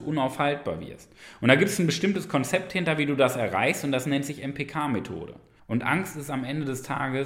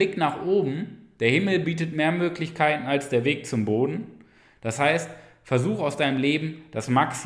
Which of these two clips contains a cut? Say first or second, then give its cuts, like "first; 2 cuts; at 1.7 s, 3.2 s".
first; 1 cut; at 5.6 s